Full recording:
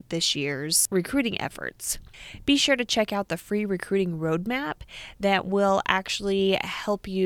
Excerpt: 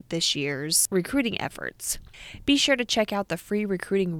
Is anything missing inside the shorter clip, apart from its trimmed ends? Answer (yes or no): no